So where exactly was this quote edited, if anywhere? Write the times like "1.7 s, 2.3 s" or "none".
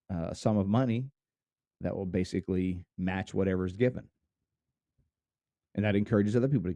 1.8 s, 2.9 s